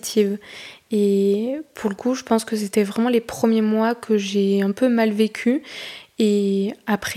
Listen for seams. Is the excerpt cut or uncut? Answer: uncut